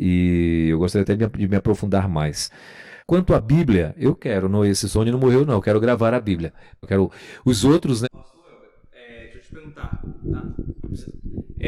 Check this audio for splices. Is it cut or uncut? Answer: cut